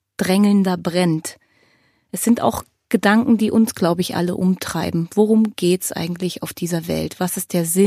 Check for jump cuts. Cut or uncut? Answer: uncut